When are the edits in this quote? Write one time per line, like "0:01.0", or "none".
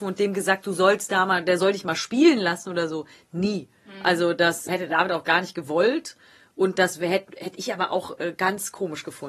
0:04.7